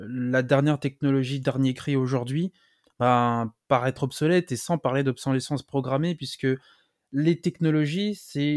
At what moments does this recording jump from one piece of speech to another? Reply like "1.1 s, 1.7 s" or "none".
2.8 s

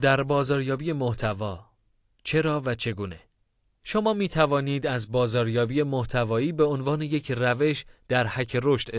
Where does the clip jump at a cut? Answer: 3.8 s

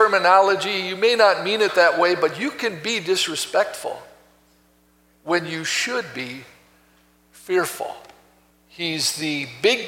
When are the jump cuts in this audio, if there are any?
8.5 s

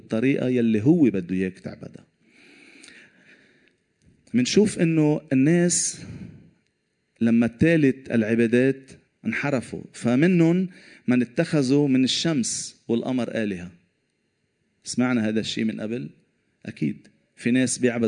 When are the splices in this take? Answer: 9.1 s

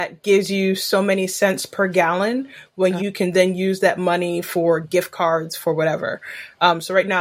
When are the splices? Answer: 3.0 s

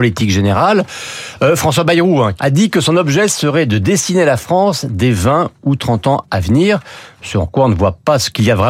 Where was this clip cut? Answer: 2.4 s

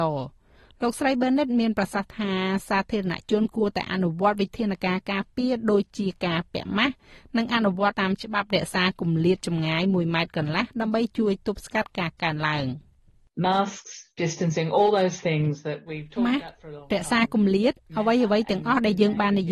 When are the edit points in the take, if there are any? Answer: 7.9 s

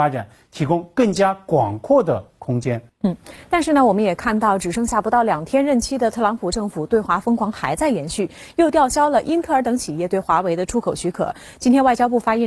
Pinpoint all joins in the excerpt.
2.9 s

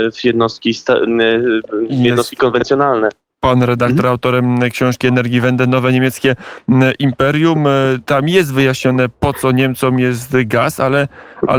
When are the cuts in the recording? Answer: none

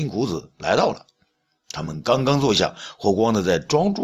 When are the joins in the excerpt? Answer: none

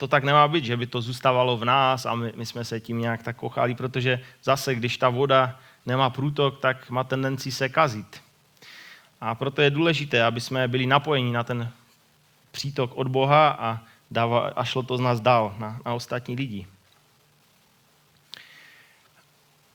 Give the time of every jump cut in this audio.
none

